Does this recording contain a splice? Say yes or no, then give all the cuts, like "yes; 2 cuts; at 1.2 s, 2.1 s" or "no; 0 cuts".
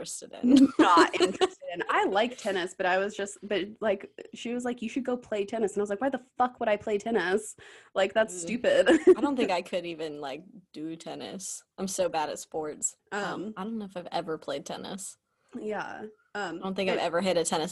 yes; 2 cuts; at 11.7 s, 13.0 s